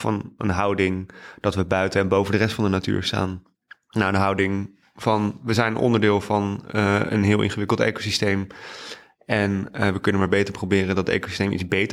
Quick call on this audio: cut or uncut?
uncut